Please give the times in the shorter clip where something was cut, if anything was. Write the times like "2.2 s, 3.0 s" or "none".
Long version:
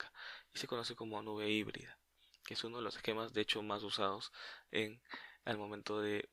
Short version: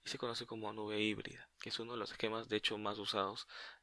1.5 s